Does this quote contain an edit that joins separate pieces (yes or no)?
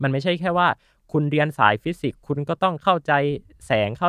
no